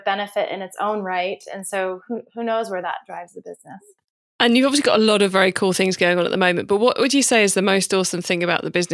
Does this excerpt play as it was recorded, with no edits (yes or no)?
yes